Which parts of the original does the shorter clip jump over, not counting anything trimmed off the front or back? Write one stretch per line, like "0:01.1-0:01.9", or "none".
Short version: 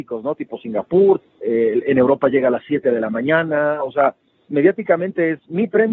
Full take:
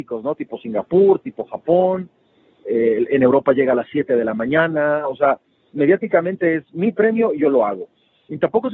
0:01.2-0:02.4